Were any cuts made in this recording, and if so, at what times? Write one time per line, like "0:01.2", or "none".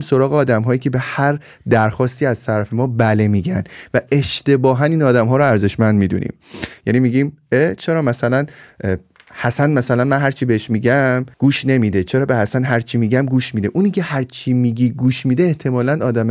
0:11.3

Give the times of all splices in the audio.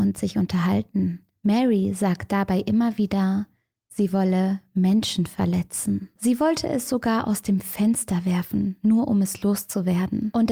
0:06.2

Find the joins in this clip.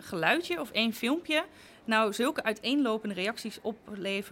none

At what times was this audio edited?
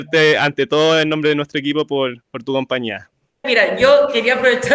0:03.4

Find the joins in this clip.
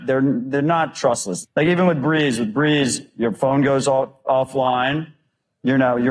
0:01.4

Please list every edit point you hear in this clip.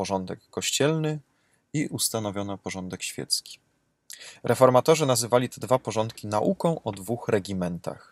none

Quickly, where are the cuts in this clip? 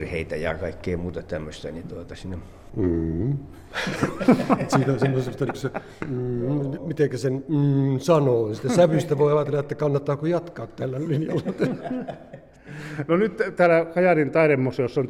0:02.7

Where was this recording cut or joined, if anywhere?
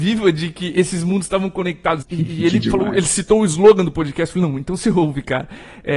0:02.0

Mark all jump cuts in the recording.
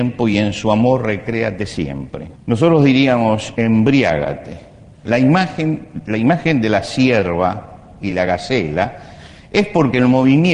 0:02.4
0:03.6
0:05.1

